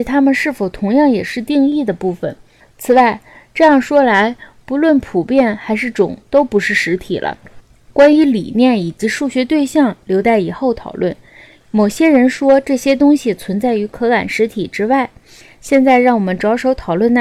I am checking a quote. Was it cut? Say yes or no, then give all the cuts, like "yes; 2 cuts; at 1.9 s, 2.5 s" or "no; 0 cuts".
no; 0 cuts